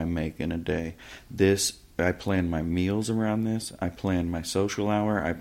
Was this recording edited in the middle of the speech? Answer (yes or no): no